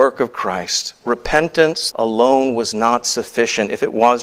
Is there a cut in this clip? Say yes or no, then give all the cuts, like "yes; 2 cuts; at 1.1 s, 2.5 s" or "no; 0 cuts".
yes; 1 cut; at 1.9 s